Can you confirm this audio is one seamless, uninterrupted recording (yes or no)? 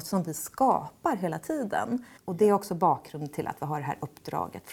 no